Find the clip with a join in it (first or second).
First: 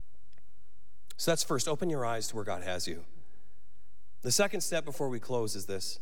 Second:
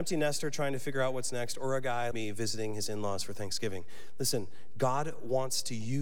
second